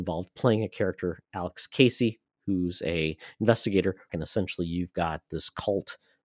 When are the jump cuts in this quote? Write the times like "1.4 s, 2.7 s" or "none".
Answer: 4.1 s